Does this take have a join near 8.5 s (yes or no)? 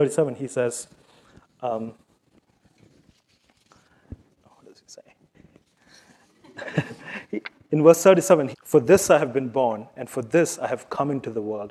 yes